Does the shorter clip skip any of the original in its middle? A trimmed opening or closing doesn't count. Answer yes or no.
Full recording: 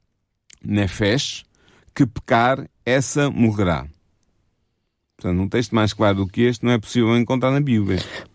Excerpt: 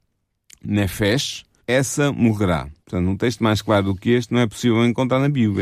yes